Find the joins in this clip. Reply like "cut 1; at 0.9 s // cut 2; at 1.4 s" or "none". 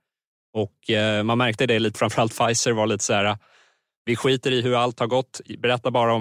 cut 1; at 1.9 s